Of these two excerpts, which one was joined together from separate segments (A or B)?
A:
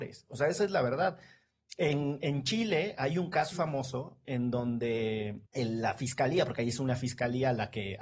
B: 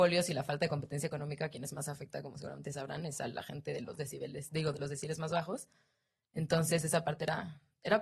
A